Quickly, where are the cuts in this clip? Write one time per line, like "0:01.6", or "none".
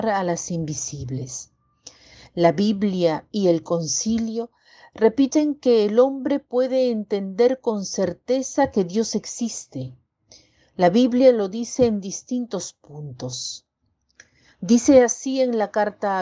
none

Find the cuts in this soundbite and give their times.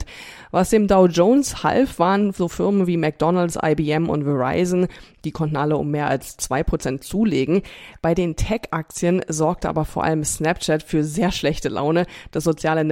none

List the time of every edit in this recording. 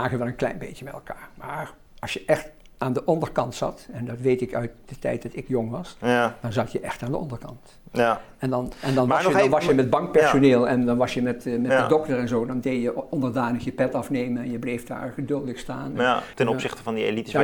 0:16.3

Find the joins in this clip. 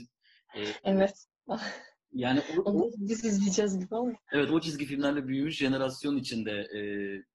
none

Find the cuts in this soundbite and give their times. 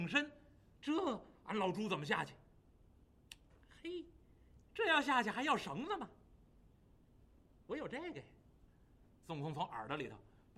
0:04.6

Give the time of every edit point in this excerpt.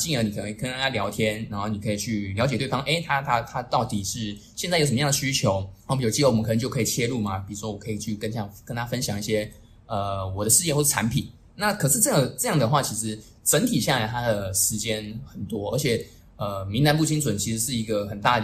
none

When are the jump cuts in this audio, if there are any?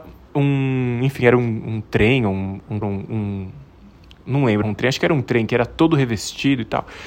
0:02.8
0:04.6

